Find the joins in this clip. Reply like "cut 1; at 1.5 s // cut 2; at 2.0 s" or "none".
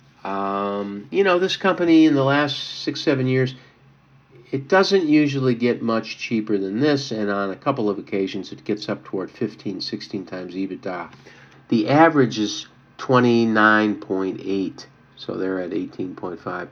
cut 1; at 11.5 s